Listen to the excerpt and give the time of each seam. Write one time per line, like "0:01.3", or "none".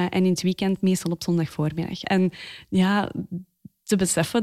0:02.0